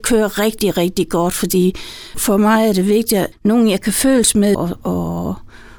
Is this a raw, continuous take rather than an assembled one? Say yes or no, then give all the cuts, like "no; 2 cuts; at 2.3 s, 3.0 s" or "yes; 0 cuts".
no; 3 cuts; at 2.1 s, 3.3 s, 4.5 s